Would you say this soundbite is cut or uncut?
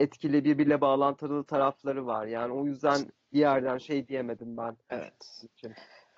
cut